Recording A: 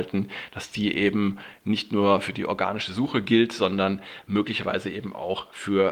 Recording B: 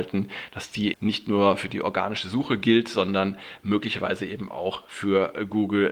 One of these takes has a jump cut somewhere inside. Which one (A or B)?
B